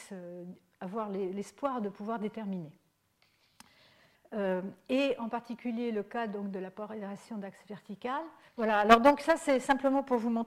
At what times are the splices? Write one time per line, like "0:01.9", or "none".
0:04.1
0:08.5